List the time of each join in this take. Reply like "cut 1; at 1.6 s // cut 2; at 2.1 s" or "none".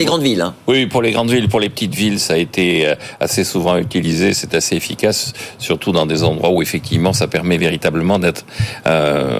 none